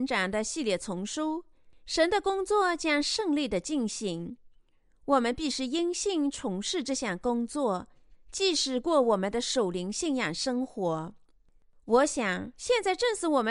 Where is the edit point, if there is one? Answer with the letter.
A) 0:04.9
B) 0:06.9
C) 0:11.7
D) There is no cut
D